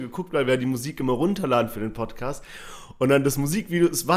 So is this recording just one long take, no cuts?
yes; 0 cuts

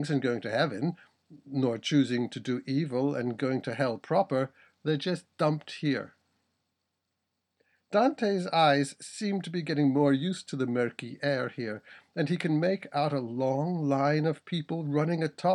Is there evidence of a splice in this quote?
no; 0 cuts

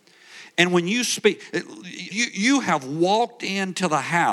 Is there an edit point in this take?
yes; 1 cut; at 2.1 s

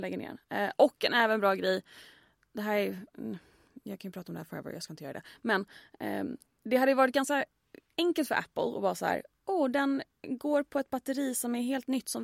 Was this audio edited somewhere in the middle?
no; 0 cuts

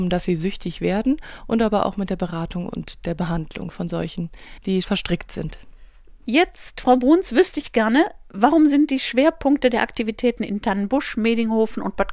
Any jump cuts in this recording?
yes; 1 cut; at 4.8 s

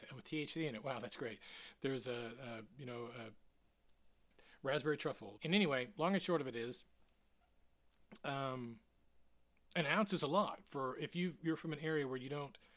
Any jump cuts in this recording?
yes; 2 cuts; at 5.4 s, 10.6 s

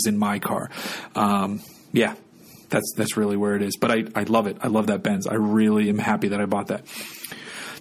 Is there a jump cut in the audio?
no; 0 cuts

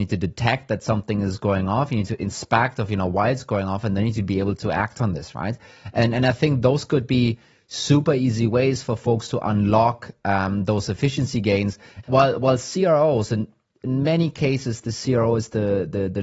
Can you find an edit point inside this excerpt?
yes; 1 cut; at 12.0 s

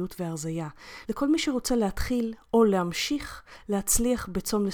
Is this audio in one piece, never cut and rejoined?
no; 1 cut; at 1.0 s

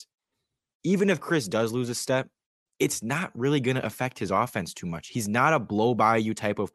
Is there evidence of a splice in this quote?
no; 0 cuts

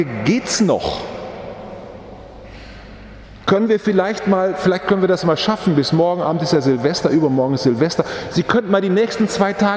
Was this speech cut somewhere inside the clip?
no; 0 cuts

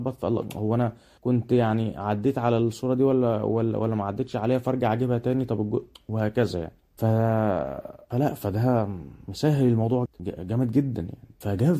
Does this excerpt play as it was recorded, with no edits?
no; 1 cut; at 10.1 s

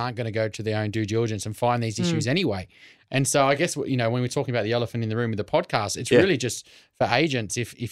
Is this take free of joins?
yes; 0 cuts

